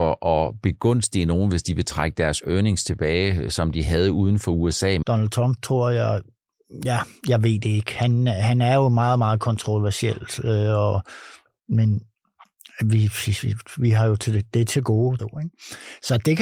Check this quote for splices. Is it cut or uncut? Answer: cut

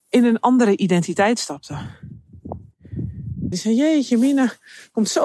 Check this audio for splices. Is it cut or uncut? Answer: cut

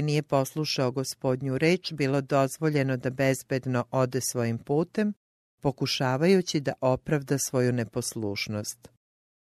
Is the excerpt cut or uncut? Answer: cut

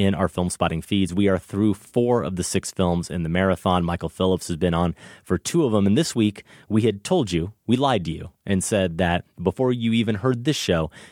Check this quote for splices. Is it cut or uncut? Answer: cut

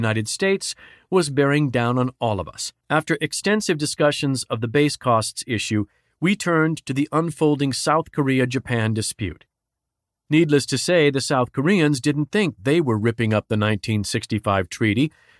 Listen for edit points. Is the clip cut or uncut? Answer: cut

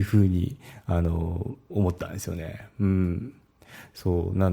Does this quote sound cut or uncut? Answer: uncut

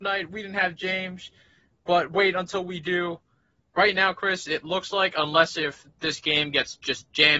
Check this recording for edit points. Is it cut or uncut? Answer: uncut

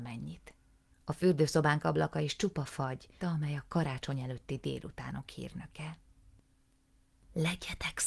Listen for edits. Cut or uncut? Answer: cut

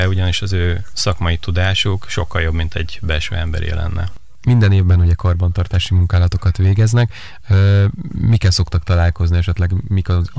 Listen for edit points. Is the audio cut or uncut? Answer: uncut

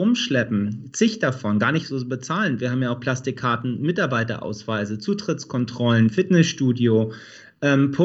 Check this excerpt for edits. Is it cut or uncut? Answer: uncut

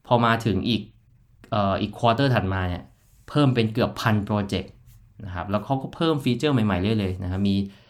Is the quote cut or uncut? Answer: uncut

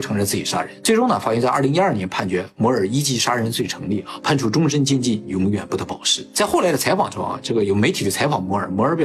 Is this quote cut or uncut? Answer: uncut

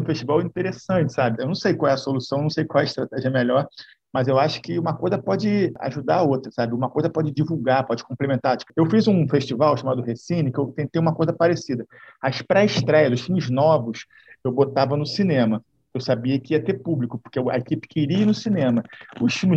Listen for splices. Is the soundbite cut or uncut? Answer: cut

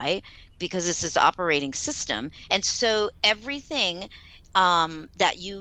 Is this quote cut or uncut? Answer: uncut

